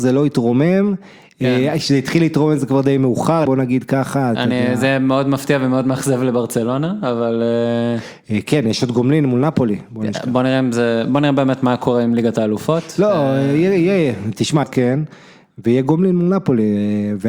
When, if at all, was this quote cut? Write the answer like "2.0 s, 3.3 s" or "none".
3.5 s, 14.6 s